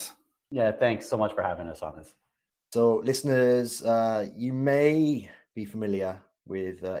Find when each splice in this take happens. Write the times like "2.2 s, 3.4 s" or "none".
none

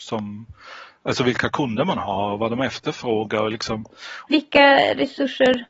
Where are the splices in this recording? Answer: 4.3 s

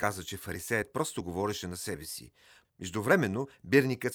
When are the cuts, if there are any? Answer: 2.6 s

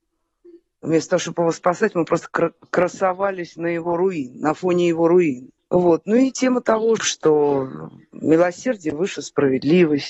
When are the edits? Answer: 5.6 s, 7.0 s

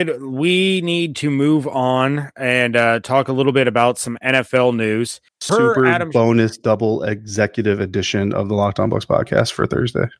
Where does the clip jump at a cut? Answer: 5.3 s

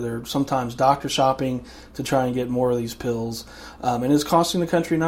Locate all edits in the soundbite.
none

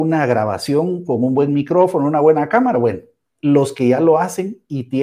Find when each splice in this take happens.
none

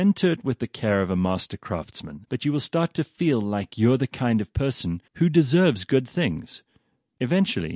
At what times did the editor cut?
2.2 s, 5.1 s

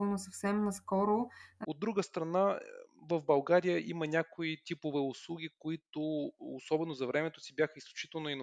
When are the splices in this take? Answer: 1.6 s

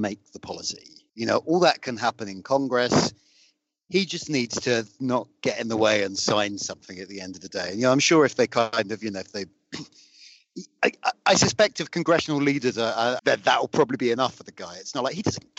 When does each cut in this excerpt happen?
1.1 s, 13.2 s

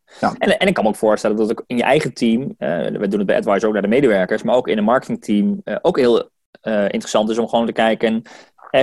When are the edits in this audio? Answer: none

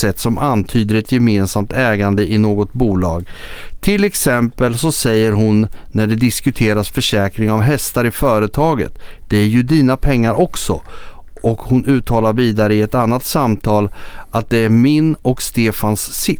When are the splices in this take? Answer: none

